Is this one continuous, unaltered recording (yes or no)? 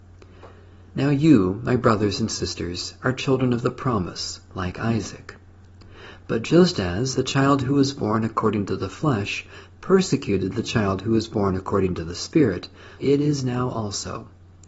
no